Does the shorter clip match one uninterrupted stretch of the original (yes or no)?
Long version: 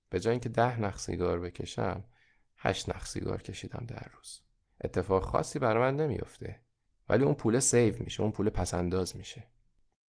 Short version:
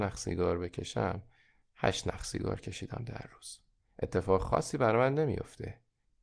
yes